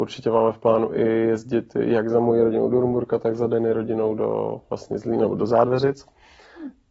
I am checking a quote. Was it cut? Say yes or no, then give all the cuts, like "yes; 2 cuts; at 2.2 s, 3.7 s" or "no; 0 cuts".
no; 0 cuts